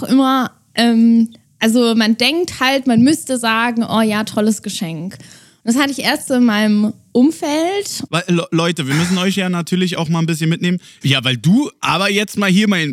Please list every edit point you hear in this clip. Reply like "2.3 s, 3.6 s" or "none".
8.1 s, 11.0 s